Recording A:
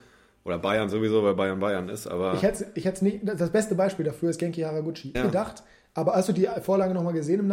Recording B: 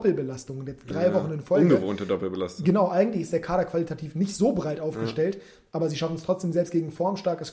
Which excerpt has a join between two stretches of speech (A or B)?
A